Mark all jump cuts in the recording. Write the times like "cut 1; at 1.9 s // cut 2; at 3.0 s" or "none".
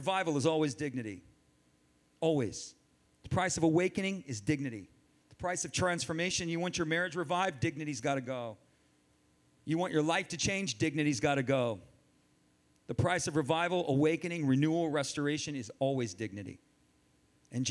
none